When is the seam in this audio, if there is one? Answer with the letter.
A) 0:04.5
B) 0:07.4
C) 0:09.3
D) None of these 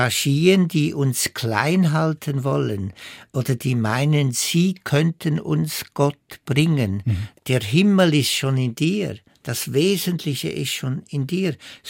B